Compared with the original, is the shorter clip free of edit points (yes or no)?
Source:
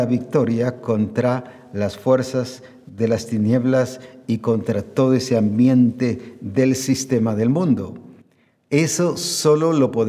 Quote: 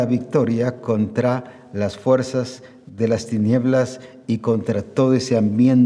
yes